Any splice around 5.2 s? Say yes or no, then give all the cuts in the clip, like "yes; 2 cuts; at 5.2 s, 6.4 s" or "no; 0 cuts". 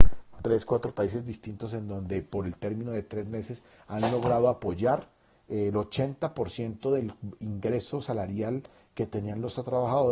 no; 0 cuts